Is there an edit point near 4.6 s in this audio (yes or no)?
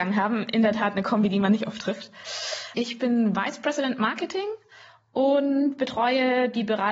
no